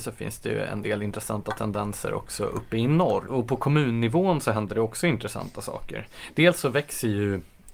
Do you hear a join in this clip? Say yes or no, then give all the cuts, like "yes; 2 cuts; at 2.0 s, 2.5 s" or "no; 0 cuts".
yes; 1 cut; at 3.3 s